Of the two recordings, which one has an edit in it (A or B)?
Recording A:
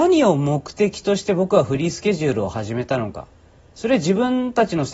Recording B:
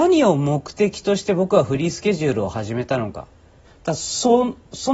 B